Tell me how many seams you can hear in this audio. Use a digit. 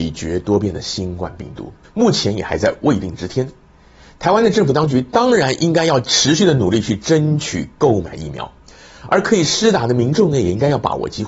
1